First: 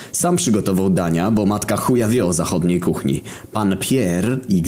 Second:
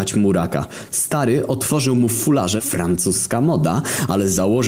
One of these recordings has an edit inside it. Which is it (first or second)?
second